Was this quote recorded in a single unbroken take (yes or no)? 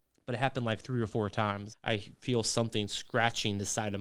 no